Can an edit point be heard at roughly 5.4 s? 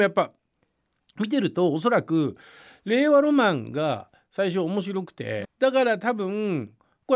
yes; 1 cut; at 5.4 s

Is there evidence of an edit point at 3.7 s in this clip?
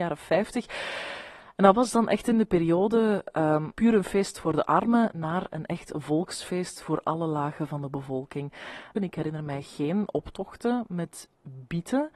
yes; 2 cuts; at 3.7 s, 9.0 s

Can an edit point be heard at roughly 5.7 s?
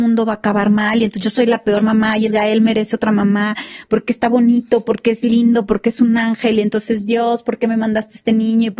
no; 1 cut; at 2.3 s

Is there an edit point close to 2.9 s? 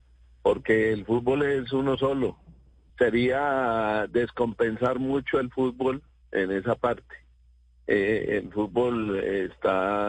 yes; 1 cut; at 2.9 s

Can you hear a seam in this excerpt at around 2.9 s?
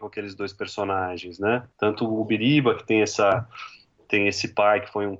no; 1 cut; at 1.7 s

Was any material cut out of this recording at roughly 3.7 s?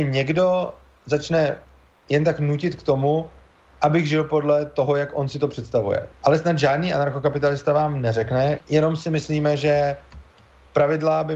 no; 2 cuts; at 6.1 s, 8.6 s

